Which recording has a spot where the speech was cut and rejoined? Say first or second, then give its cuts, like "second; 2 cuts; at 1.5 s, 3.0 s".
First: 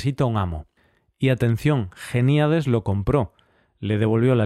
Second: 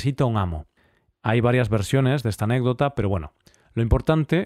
second; 1 cut; at 1.1 s